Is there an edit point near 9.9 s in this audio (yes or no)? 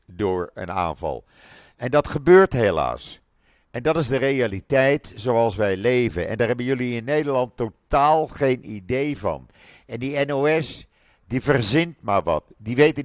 no